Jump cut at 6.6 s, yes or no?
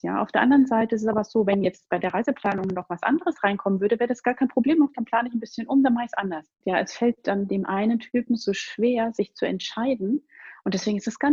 yes